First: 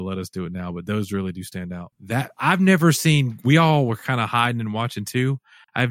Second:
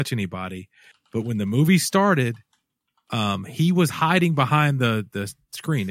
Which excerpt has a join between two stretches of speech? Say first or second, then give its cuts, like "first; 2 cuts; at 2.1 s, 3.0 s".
first; 1 cut; at 1.9 s